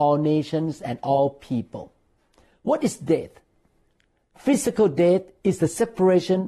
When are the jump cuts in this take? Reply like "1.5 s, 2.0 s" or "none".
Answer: none